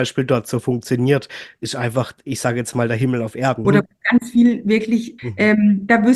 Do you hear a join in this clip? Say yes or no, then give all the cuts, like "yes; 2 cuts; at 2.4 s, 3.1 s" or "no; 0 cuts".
yes; 2 cuts; at 3.6 s, 5.2 s